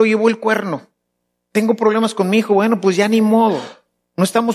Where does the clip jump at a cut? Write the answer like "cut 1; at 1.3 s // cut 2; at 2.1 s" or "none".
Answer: none